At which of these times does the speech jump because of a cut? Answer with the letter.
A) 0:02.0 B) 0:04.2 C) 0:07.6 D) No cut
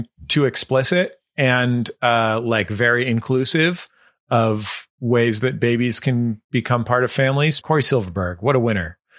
C